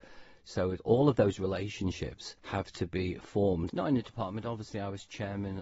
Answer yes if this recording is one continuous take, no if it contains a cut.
no